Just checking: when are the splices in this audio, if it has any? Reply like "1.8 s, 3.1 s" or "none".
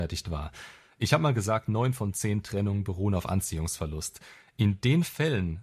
none